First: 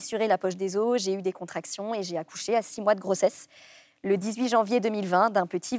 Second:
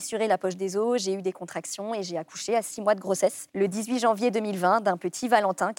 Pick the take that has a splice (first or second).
second